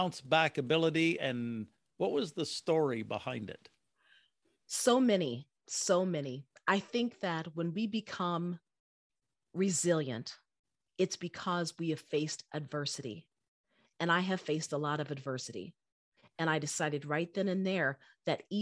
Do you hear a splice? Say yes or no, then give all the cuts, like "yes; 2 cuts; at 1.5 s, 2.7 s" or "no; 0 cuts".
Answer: yes; 2 cuts; at 5.5 s, 16.2 s